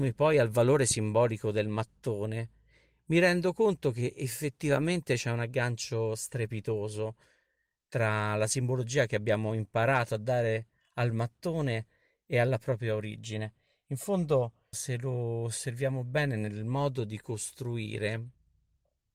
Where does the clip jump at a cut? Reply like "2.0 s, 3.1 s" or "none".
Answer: 14.7 s